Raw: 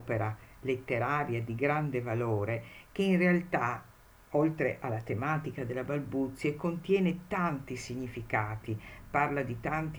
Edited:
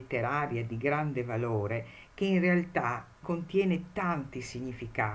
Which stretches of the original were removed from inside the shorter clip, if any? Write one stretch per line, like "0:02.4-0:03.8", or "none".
0:04.0-0:06.6